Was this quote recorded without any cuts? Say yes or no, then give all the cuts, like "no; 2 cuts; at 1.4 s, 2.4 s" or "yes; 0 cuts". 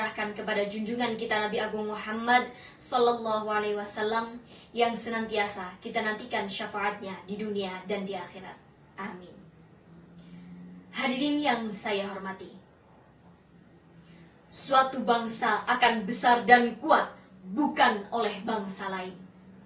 yes; 0 cuts